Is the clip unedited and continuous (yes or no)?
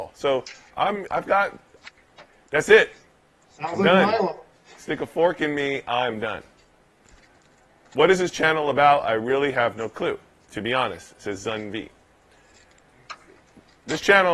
yes